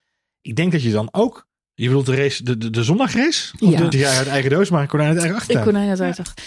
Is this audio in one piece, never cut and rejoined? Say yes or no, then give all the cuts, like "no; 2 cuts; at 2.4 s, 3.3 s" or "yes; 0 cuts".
no; 2 cuts; at 1.7 s, 3.9 s